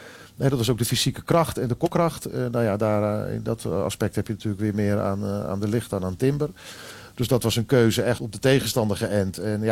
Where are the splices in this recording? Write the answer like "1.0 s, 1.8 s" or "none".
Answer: 8.2 s